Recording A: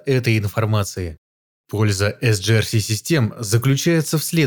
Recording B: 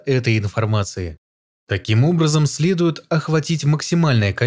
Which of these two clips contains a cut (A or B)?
A